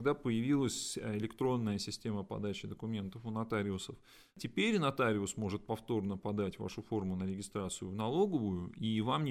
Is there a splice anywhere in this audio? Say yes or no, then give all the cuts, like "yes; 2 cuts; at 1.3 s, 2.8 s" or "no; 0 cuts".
no; 0 cuts